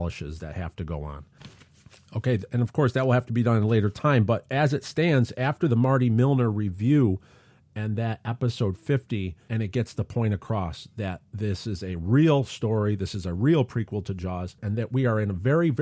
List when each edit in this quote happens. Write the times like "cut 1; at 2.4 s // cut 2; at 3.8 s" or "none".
none